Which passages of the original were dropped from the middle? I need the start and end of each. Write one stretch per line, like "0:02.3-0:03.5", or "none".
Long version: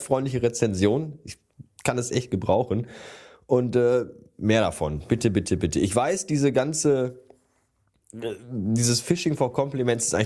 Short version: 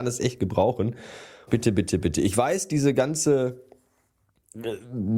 0:03.4-0:05.1